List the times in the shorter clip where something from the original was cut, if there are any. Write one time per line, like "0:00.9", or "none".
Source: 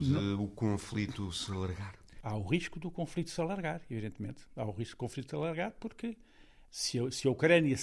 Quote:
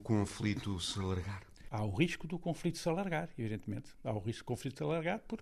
none